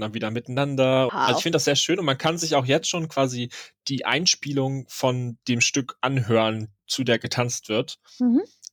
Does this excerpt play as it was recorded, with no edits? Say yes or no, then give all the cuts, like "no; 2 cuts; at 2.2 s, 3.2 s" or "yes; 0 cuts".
no; 1 cut; at 1.1 s